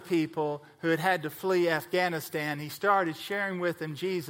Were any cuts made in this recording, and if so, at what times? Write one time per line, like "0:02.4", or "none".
none

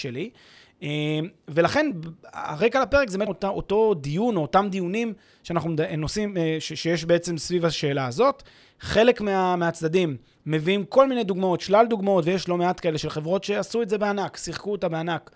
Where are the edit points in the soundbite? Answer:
0:03.3

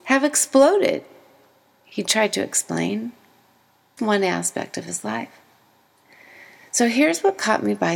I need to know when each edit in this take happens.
0:04.0

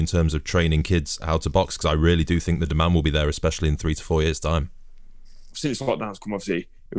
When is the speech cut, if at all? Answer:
0:05.5

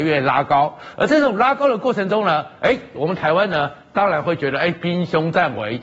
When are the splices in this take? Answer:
none

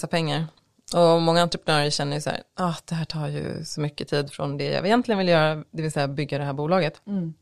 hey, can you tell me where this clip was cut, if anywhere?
none

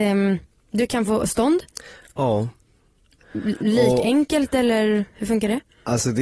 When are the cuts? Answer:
none

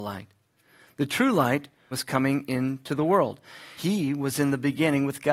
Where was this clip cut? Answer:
0:01.9
0:03.8

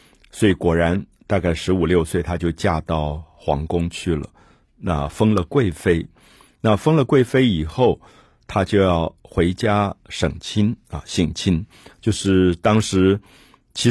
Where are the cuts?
none

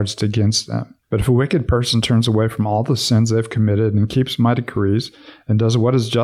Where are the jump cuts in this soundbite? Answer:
0:01.0

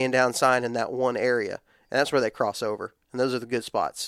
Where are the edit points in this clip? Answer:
none

